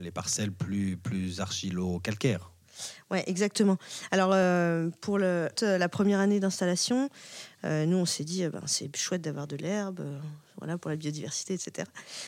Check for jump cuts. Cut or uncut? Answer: cut